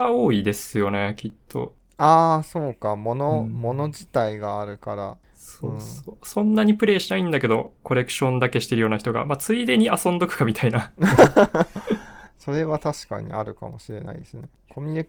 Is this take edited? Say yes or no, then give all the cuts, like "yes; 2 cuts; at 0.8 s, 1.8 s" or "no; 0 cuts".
no; 0 cuts